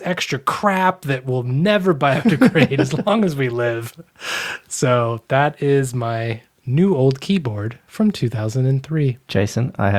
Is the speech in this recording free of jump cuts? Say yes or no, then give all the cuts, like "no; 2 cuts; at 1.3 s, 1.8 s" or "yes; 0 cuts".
yes; 0 cuts